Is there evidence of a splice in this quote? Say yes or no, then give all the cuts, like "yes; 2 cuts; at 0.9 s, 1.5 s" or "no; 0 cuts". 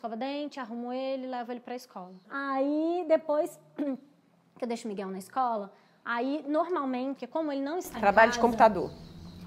yes; 2 cuts; at 2.2 s, 7.2 s